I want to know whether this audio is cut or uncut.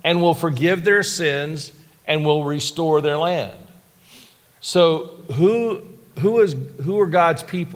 uncut